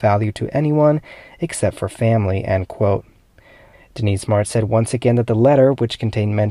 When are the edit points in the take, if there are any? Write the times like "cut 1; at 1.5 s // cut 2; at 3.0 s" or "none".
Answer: cut 1; at 3.7 s